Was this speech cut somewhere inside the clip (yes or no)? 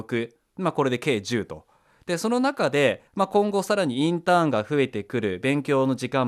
no